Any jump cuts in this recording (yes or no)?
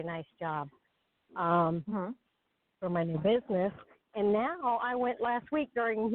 no